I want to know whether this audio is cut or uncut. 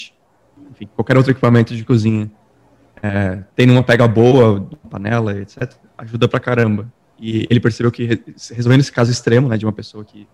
uncut